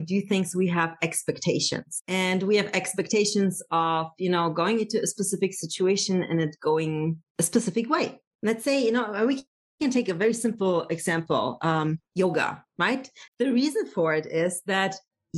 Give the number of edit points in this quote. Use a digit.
1